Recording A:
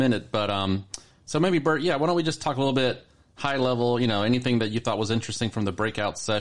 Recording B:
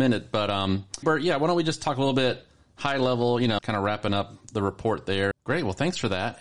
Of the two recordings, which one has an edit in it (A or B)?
B